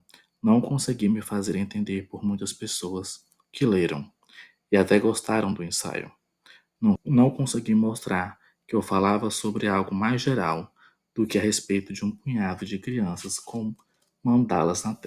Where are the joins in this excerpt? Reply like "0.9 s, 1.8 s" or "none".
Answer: 7.0 s

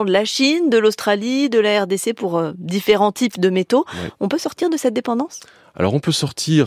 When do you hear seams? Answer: none

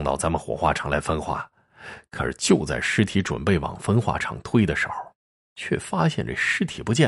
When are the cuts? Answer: none

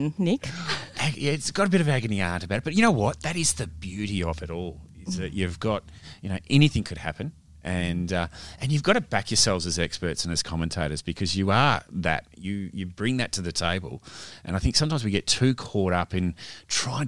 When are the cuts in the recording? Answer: none

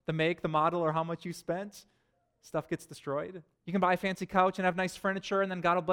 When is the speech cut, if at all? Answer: 3.6 s

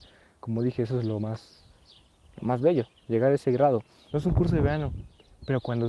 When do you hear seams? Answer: 4.1 s

